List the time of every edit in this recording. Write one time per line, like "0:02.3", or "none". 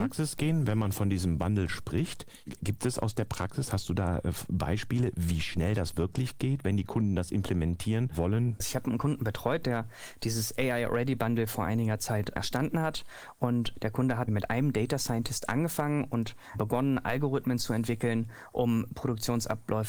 none